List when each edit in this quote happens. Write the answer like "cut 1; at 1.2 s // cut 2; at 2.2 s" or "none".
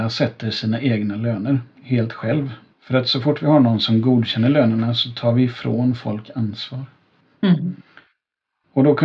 cut 1; at 2.7 s // cut 2; at 7.3 s